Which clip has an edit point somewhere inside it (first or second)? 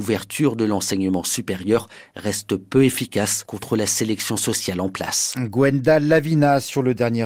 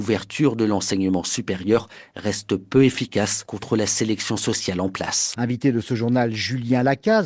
second